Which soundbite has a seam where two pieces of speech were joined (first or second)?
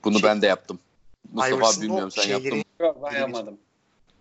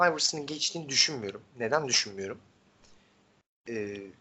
first